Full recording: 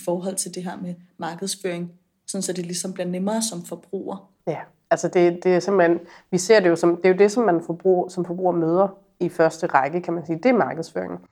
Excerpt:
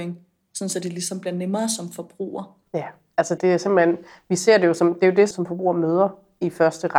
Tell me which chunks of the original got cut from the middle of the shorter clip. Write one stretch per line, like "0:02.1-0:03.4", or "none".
0:05.1-0:05.4
0:07.3-0:08.1